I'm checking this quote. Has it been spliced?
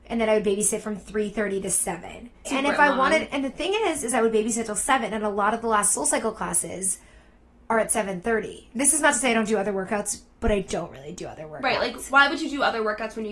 yes; 1 cut; at 2.4 s

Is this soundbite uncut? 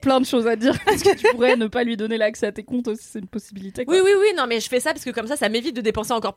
yes; 0 cuts

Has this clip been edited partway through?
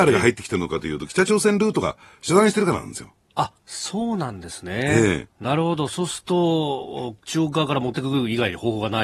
no; 0 cuts

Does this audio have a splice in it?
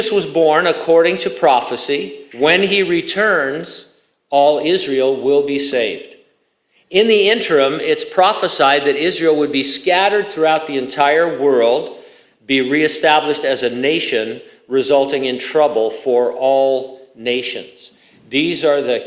yes; 2 cuts; at 2.3 s, 12.3 s

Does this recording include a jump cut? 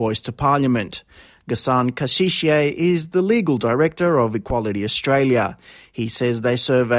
no; 0 cuts

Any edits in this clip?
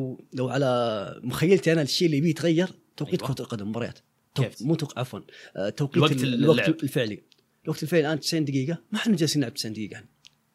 yes; 1 cut; at 4.5 s

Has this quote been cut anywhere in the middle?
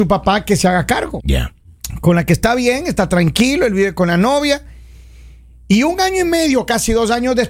yes; 1 cut; at 1.2 s

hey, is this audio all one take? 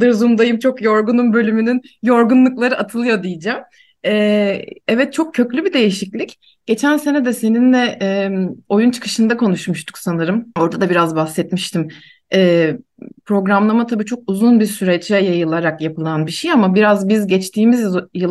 no; 1 cut; at 10.6 s

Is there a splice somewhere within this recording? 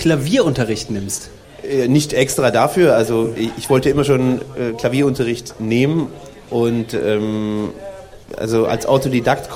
no; 0 cuts

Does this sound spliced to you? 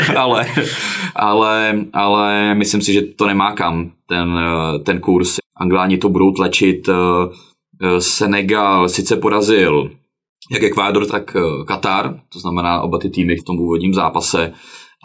yes; 3 cuts; at 5.4 s, 11.1 s, 13.4 s

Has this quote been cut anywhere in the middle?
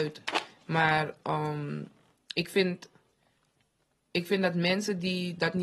no; 0 cuts

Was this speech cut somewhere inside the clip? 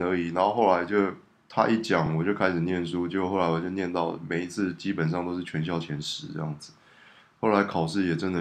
no; 0 cuts

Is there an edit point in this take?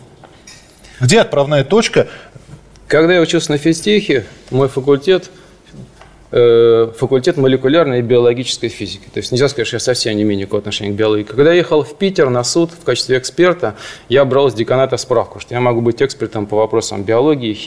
no; 0 cuts

